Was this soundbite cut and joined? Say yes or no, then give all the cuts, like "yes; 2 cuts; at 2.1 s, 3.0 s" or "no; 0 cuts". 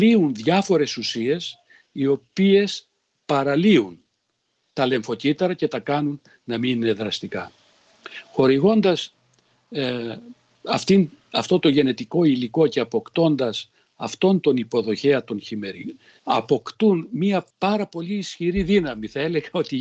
yes; 2 cuts; at 16.2 s, 17.5 s